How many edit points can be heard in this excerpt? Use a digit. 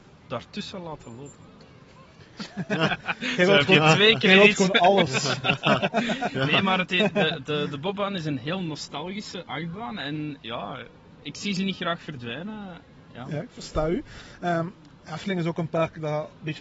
0